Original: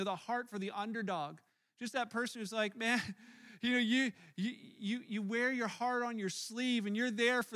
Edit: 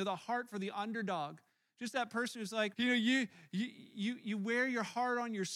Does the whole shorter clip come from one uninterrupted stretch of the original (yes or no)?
no